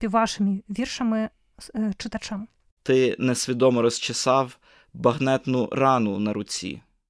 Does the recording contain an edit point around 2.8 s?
yes; 1 cut; at 2.8 s

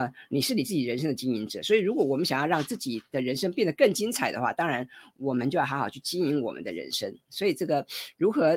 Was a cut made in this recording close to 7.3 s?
yes; 1 cut; at 7.3 s

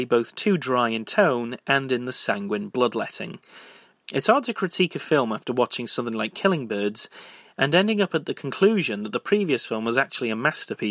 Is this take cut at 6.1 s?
no; 1 cut; at 3.9 s

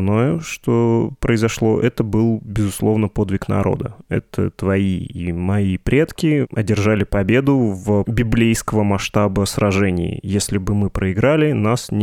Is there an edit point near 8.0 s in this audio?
yes; 1 cut; at 8.0 s

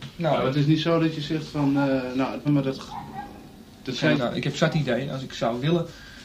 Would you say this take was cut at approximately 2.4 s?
yes; 2 cuts; at 2.4 s, 4.1 s

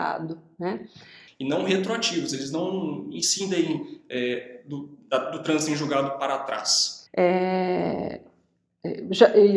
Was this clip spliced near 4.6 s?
no; 2 cuts; at 1.3 s, 7.1 s

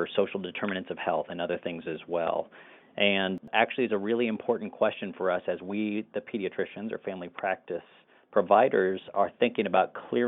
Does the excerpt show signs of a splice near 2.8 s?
yes; 1 cut; at 2.8 s

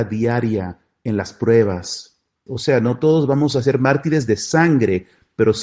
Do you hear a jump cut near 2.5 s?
yes; 1 cut; at 2.5 s

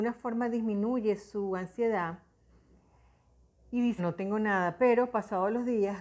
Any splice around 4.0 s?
yes; 1 cut; at 4.0 s

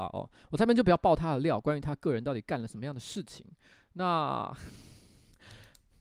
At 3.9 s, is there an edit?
no; 0 cuts

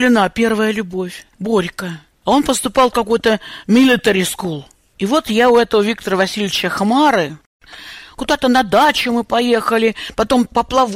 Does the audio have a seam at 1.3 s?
yes; 1 cut; at 1.3 s

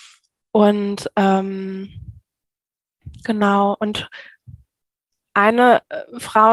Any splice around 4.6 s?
no; 0 cuts

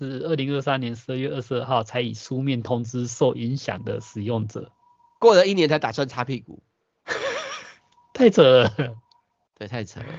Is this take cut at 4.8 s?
no; 0 cuts

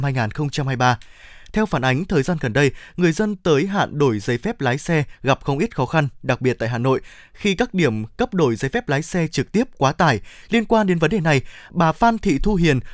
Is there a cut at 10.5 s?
yes; 1 cut; at 10.5 s

